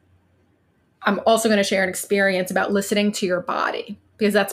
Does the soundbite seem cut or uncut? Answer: uncut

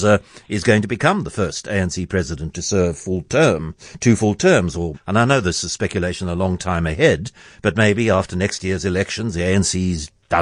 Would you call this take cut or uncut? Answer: cut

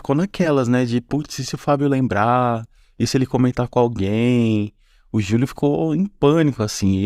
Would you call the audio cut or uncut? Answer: uncut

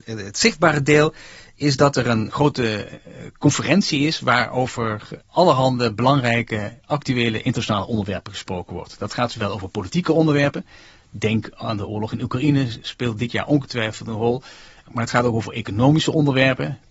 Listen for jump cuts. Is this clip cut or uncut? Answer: uncut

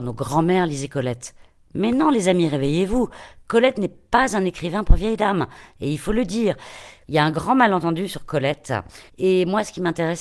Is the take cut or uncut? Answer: cut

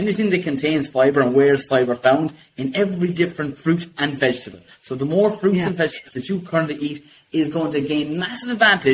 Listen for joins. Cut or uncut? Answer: uncut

